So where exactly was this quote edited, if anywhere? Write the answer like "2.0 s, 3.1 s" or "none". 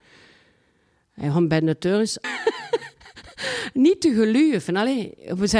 2.2 s

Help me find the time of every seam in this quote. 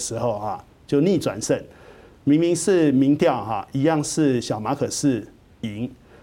none

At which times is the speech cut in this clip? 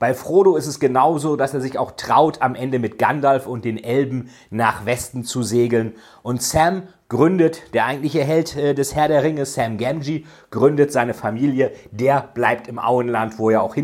none

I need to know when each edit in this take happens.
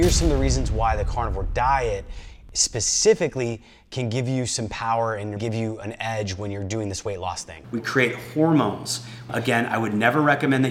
5.4 s, 7.6 s, 9.3 s

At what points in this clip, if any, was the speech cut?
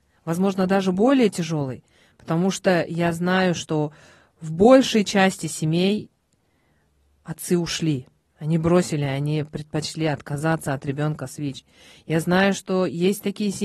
none

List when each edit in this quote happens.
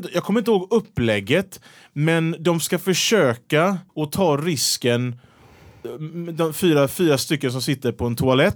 3.9 s

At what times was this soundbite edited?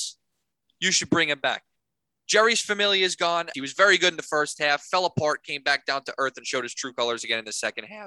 3.5 s

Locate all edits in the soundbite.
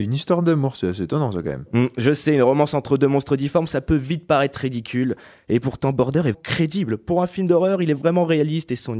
6.3 s

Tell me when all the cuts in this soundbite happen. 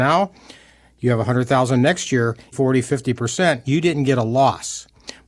2.5 s

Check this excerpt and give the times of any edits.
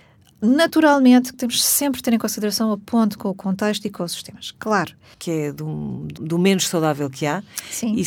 1.3 s, 5.1 s, 6.2 s

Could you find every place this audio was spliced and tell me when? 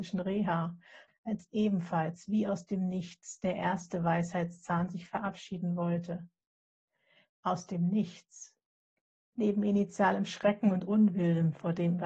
1.1 s, 7.3 s, 9.3 s

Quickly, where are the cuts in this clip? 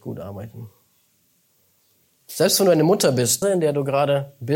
2.2 s, 3.4 s

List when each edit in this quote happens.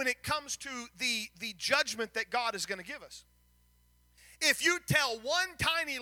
1.3 s

